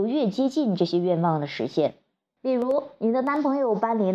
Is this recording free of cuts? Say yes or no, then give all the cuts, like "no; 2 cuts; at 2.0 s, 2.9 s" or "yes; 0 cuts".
no; 1 cut; at 2.4 s